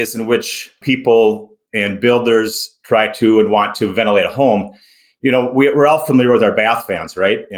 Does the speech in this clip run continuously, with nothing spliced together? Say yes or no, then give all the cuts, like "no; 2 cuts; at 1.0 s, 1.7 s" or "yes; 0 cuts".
yes; 0 cuts